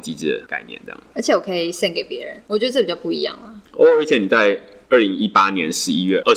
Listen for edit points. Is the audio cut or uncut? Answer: uncut